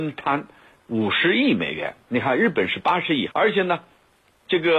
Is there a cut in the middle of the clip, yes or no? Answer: yes